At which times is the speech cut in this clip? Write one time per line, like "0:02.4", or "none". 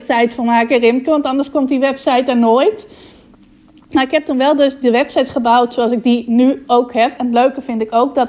0:07.2